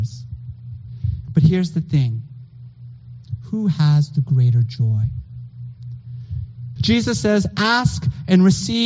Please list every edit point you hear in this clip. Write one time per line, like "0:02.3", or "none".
0:01.3
0:06.8